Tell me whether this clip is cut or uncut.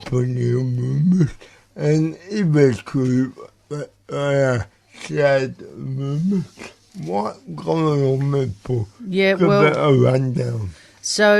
cut